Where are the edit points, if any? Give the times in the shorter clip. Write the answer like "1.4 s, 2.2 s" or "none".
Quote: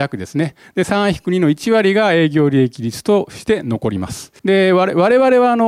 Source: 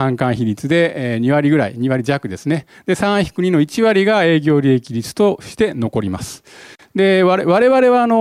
4.4 s